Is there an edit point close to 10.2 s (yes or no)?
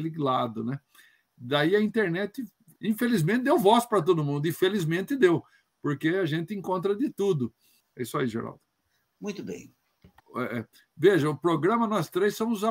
yes